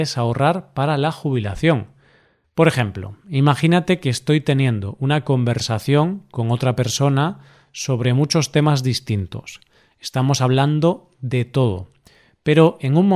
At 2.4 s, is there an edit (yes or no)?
yes